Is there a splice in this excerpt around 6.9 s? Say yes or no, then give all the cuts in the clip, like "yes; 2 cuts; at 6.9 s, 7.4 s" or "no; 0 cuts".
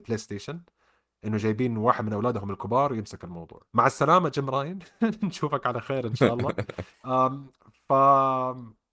yes; 2 cuts; at 3.7 s, 6.9 s